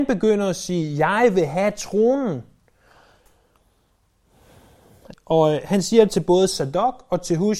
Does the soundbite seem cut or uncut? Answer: cut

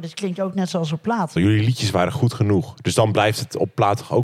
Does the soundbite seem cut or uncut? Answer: cut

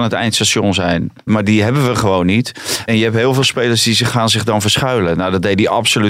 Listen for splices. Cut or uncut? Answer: cut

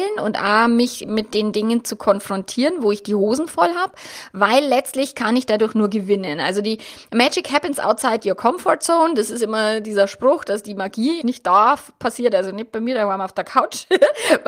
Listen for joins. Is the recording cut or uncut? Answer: cut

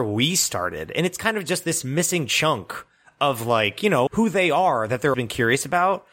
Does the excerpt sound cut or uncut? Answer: cut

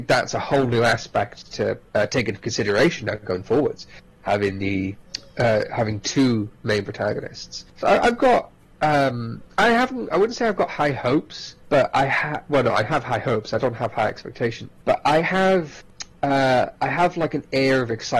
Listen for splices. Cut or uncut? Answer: cut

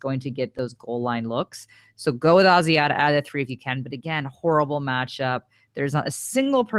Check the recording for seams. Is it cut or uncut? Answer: cut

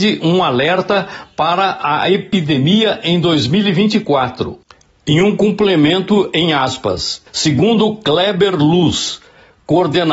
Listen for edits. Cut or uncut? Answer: cut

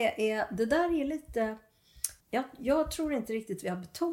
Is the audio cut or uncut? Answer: cut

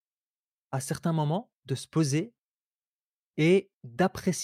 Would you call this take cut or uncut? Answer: uncut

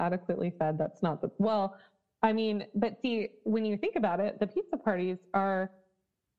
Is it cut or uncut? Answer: uncut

